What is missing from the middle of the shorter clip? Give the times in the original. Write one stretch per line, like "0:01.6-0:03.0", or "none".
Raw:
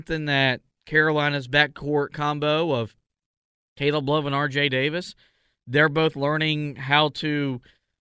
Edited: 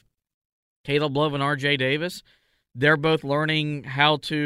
none